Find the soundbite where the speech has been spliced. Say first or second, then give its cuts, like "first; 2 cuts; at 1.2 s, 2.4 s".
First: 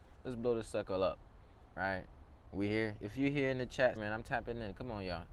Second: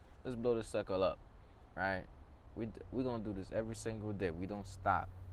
first; 2 cuts; at 2.5 s, 4.0 s